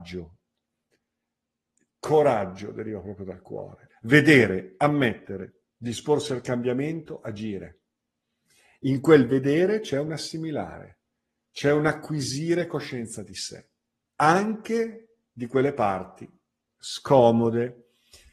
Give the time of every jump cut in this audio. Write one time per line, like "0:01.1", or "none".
0:03.9

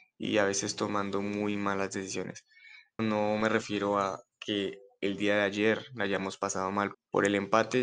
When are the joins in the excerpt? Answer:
0:03.0
0:06.9

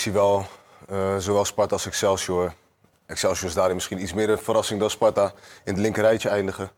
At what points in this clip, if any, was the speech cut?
none

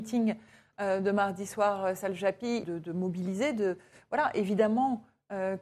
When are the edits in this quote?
0:02.6

